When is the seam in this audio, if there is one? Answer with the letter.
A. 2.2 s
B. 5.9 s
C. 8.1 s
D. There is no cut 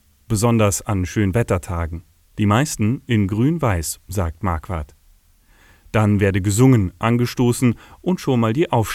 A